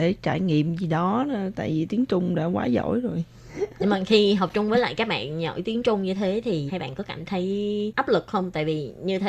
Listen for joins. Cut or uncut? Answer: cut